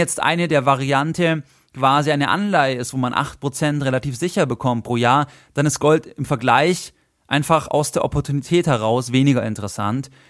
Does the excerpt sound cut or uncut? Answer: uncut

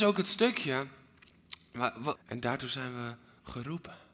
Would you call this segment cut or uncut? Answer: cut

